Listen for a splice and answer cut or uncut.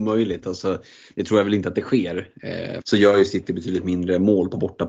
cut